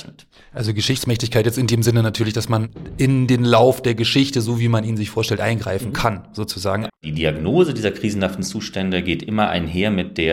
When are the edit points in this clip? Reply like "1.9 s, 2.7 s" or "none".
6.9 s